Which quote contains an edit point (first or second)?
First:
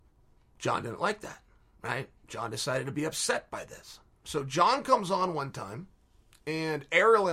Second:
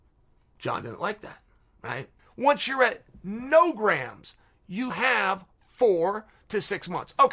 second